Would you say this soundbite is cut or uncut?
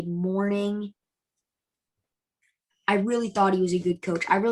cut